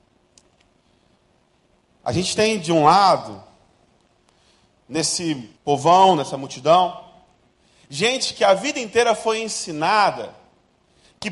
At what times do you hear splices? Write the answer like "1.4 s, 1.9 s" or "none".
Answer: 5.6 s